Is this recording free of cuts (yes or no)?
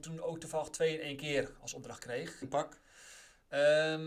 no